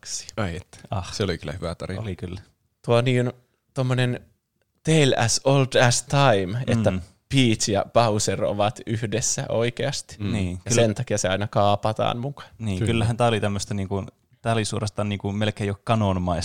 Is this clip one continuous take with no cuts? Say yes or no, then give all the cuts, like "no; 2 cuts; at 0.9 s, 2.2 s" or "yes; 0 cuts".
yes; 0 cuts